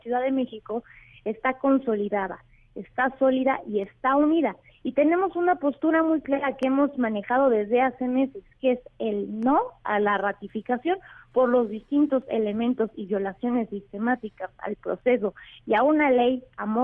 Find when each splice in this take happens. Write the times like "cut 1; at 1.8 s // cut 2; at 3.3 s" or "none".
none